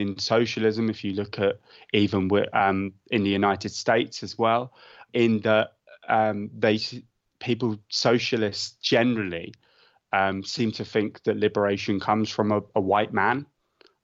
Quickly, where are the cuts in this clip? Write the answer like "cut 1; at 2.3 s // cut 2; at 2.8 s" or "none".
cut 1; at 5.1 s